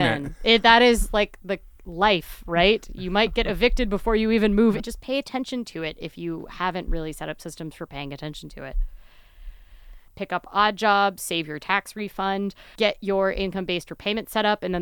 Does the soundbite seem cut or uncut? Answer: cut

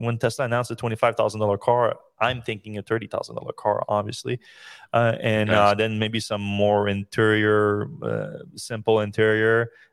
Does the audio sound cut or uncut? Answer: uncut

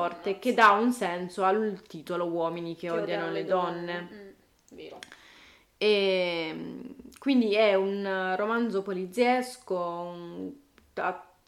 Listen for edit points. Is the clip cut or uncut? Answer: uncut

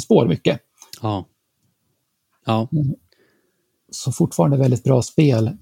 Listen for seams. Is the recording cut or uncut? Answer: uncut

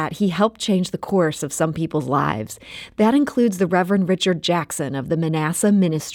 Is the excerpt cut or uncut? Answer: uncut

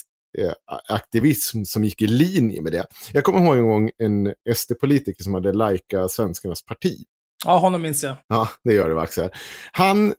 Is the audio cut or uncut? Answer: cut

